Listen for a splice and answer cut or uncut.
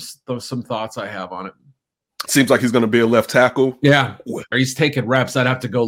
cut